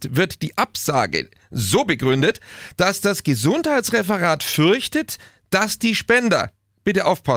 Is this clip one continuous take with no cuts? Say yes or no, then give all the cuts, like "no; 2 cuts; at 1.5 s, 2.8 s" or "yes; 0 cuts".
yes; 0 cuts